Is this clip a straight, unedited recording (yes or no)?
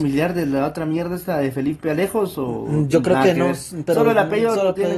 yes